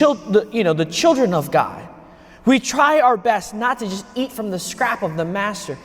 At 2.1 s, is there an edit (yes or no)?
no